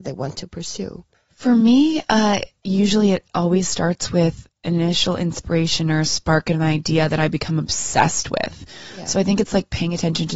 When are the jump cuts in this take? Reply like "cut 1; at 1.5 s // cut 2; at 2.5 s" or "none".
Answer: cut 1; at 1.1 s